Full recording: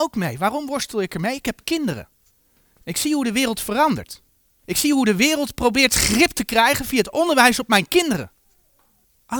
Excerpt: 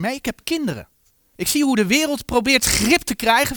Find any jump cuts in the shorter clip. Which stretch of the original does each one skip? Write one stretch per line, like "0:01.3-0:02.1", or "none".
0:02.5-0:04.6